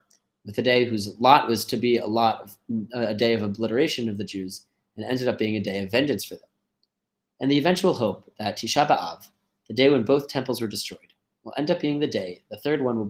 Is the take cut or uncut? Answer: uncut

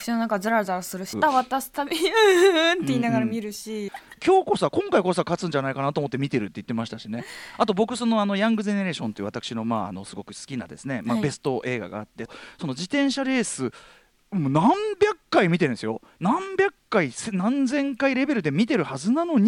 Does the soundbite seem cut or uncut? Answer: cut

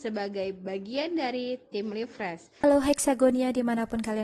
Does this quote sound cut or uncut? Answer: cut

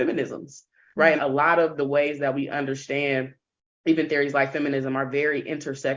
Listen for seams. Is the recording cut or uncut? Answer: cut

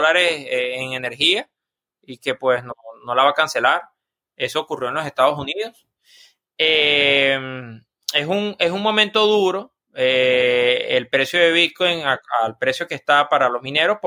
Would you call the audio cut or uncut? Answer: uncut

